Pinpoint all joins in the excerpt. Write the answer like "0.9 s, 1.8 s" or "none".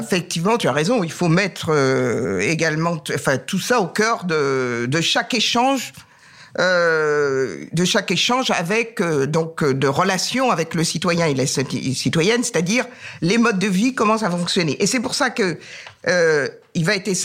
none

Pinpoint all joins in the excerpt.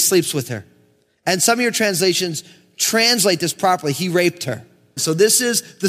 5.0 s

